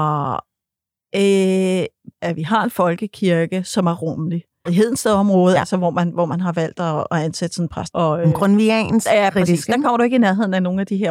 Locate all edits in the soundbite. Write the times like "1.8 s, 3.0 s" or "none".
2.1 s, 4.7 s, 7.9 s